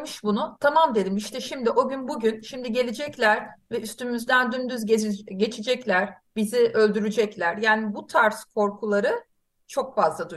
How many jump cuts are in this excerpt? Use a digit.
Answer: 0